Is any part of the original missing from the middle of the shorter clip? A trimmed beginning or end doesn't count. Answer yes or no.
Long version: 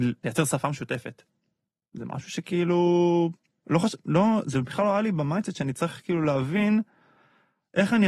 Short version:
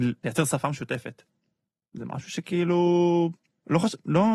no